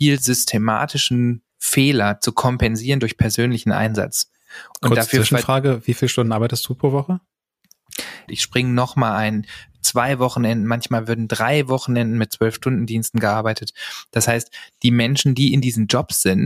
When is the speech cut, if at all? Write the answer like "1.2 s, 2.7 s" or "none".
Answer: 8.3 s